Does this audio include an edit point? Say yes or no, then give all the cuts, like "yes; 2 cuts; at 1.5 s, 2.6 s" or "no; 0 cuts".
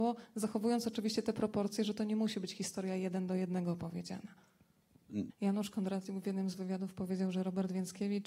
yes; 1 cut; at 5.3 s